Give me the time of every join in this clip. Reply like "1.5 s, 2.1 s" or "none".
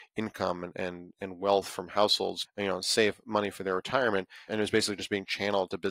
2.4 s